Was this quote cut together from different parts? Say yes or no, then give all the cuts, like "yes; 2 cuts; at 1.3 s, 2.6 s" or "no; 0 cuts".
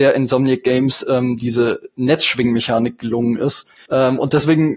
yes; 1 cut; at 3.9 s